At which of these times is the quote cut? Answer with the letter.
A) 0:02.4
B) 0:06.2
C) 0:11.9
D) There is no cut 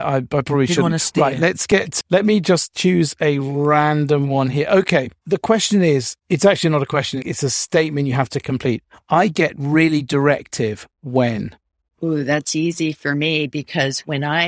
B